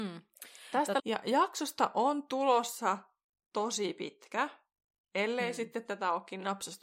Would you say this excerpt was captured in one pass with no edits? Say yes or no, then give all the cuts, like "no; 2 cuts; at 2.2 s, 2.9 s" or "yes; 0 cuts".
no; 1 cut; at 1.0 s